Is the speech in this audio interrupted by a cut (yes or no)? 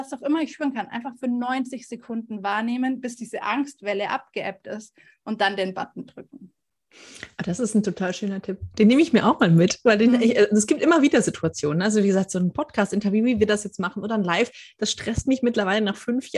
no